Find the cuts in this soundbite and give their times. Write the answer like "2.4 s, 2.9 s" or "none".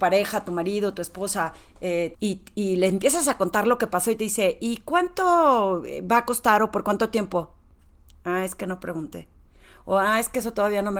2.1 s

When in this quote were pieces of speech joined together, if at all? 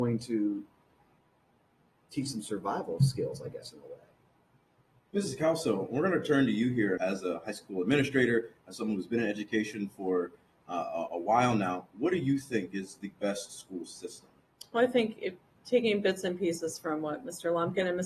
7.0 s, 11.1 s

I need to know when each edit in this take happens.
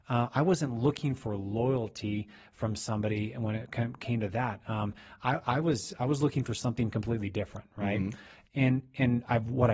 8.5 s

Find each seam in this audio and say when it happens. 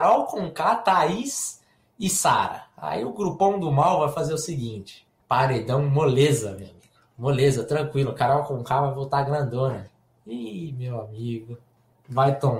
5.2 s

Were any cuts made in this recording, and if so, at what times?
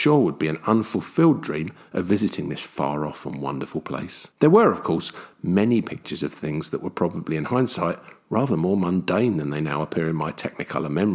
4.3 s

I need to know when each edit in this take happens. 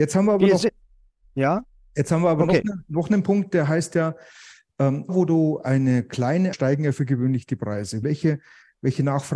5.1 s, 6.5 s, 8.0 s

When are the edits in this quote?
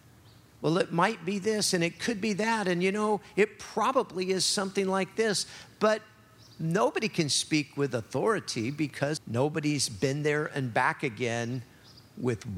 9.2 s

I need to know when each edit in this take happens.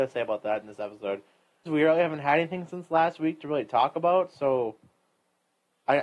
1.7 s

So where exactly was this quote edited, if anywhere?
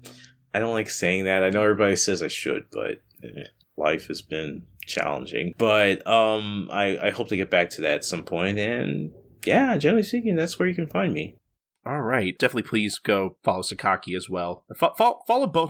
3.8 s

